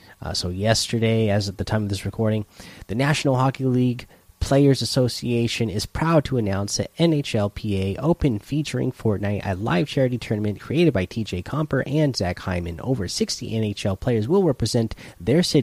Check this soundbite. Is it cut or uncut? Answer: uncut